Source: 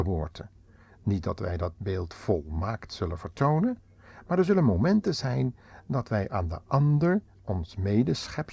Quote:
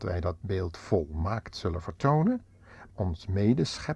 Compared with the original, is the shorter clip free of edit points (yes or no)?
no